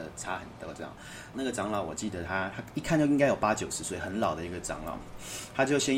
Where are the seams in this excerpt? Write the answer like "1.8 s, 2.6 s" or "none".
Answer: 1.3 s